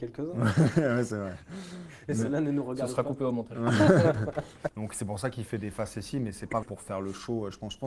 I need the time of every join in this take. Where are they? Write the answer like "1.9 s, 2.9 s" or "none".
4.7 s, 6.6 s